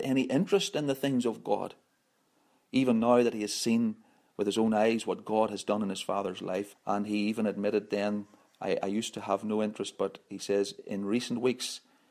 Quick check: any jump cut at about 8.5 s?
no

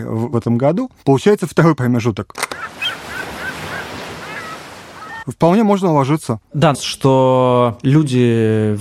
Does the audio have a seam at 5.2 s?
yes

